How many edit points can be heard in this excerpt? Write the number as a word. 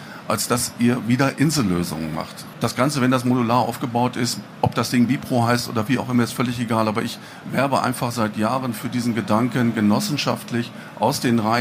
one